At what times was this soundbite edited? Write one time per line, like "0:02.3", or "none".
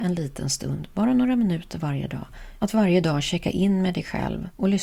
0:02.6